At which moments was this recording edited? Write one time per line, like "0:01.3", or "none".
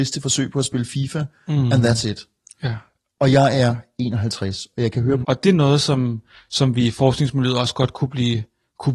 0:05.2